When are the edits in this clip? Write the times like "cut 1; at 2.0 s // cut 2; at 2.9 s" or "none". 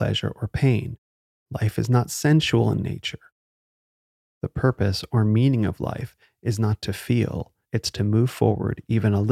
cut 1; at 7.6 s